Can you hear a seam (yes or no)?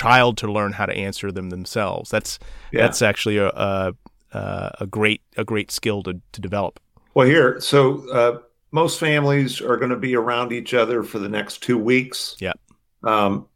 no